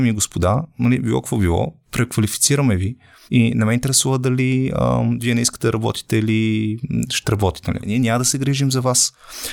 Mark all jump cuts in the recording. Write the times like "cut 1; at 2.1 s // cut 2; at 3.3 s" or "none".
cut 1; at 7.8 s